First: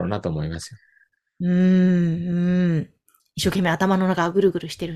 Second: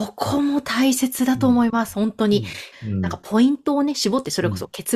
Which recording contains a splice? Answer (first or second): second